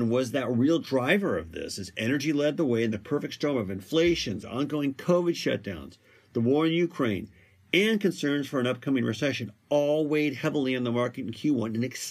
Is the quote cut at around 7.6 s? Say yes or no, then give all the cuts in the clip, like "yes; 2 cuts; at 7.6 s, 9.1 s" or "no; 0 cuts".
no; 1 cut; at 4.4 s